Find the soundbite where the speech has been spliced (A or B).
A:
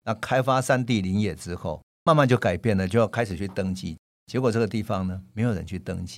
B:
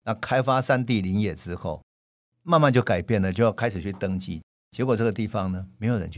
A